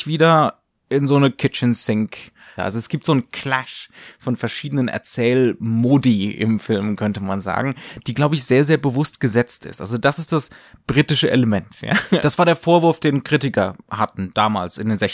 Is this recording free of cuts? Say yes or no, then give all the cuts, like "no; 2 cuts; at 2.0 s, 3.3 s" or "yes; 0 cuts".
no; 2 cuts; at 2.6 s, 12.2 s